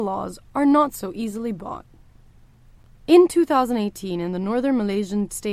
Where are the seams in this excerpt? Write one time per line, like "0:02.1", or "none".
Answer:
none